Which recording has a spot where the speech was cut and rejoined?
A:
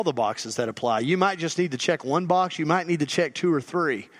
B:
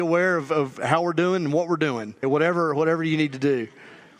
B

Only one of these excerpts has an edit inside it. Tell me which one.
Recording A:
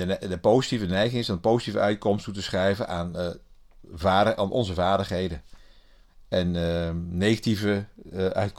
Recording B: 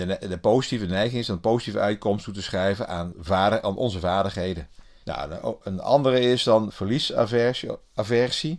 B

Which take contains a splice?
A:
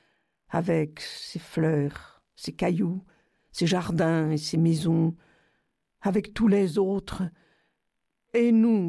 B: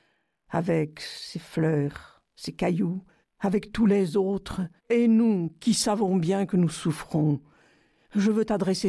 B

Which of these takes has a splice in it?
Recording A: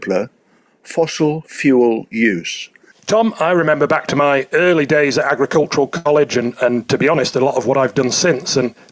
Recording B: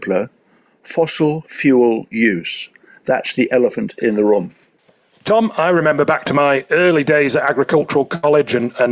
A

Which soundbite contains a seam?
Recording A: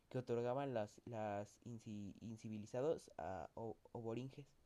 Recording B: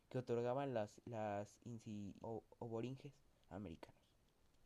B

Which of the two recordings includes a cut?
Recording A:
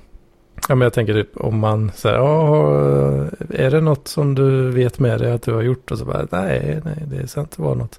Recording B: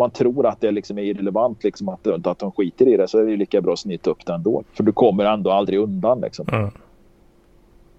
B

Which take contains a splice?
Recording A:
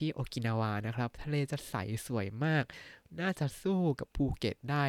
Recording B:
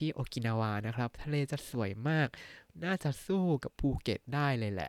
B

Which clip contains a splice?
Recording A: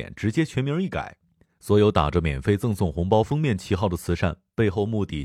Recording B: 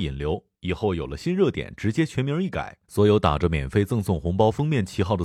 B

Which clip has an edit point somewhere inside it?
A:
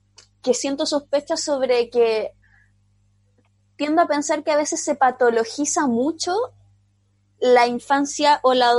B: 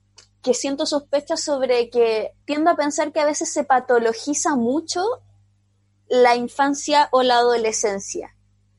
B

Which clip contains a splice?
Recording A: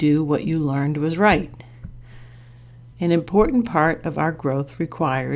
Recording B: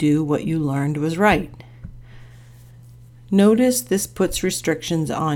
A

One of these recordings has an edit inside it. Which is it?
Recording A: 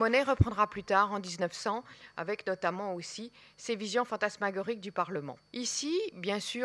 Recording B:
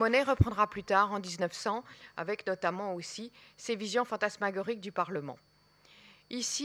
A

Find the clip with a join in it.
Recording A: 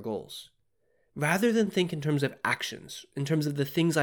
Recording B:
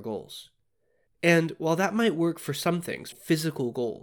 B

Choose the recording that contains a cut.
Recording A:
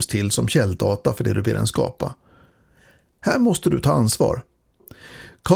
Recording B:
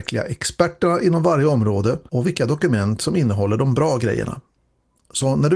B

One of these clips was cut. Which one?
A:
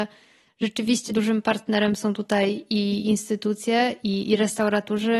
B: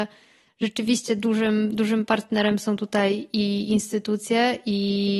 A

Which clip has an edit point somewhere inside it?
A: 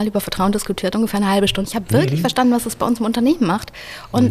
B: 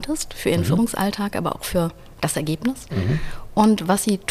A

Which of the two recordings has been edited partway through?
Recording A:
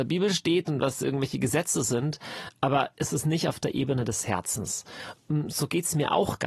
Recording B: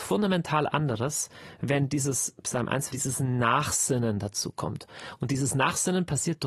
B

